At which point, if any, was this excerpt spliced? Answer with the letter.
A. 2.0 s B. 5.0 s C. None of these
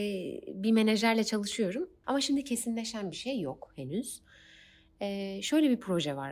A